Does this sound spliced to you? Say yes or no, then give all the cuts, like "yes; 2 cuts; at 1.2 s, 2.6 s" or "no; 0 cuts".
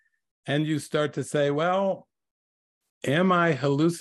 yes; 1 cut; at 2.9 s